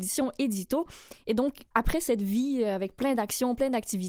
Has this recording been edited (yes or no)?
yes